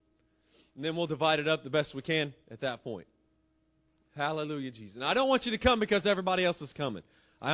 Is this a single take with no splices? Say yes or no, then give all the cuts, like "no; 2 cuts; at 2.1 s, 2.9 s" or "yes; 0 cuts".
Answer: yes; 0 cuts